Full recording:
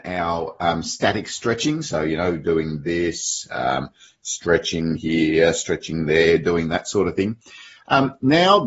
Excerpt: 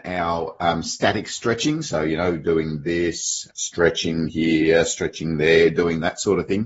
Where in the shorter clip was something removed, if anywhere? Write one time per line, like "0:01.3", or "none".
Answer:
0:03.5